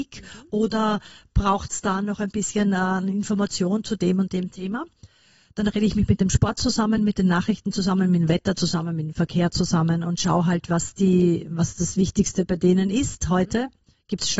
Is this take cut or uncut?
uncut